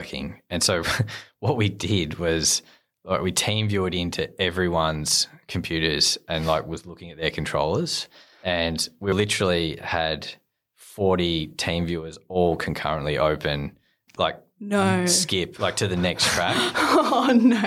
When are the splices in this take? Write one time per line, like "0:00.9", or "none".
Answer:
none